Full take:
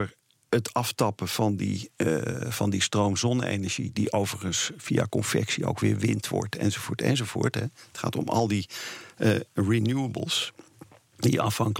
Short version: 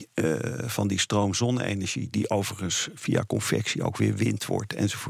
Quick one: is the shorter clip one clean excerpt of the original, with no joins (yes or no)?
yes